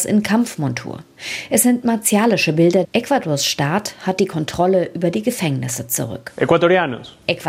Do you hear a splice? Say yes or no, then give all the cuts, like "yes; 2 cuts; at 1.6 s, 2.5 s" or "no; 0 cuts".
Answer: yes; 1 cut; at 2.8 s